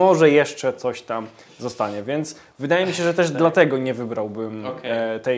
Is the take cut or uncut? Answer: uncut